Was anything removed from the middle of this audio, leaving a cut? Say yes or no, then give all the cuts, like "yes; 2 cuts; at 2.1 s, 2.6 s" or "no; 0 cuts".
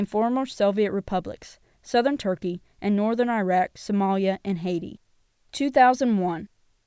no; 0 cuts